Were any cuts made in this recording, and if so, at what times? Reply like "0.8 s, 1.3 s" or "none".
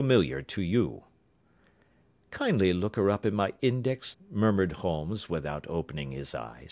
4.1 s